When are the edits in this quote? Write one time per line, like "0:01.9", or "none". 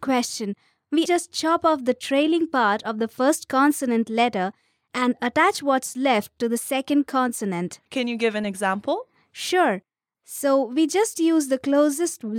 0:01.1
0:07.9
0:10.1